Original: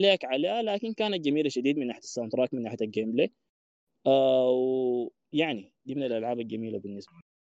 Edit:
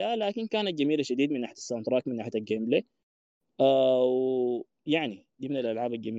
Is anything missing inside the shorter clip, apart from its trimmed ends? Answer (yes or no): no